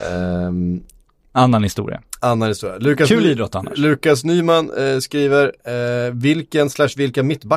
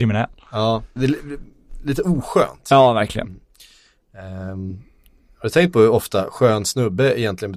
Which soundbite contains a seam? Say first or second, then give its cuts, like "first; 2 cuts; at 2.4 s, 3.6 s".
second; 1 cut; at 1.0 s